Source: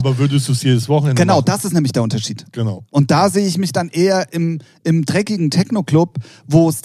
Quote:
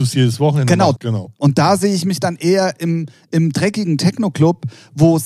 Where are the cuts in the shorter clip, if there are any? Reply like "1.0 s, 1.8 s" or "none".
1.0 s